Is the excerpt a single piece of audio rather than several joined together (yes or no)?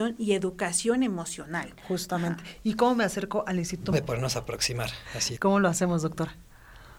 no